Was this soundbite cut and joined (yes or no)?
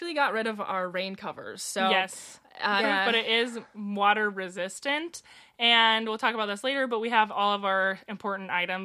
yes